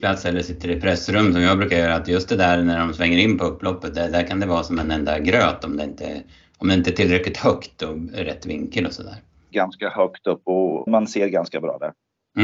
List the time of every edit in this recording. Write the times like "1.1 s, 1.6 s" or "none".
9.5 s, 10.9 s